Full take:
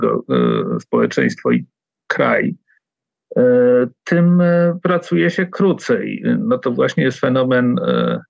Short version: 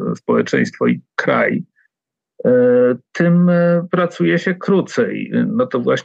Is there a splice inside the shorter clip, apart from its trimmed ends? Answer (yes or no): yes